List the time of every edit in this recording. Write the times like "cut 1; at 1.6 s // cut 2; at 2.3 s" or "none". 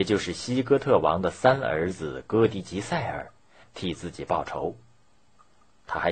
cut 1; at 3.6 s